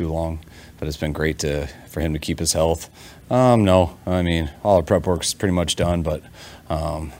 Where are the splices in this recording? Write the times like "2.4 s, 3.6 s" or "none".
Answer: 3.2 s